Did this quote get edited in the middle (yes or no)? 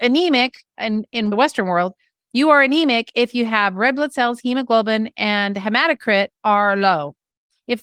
no